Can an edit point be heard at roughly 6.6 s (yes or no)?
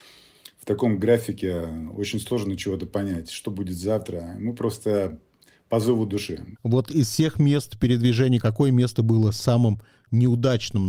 yes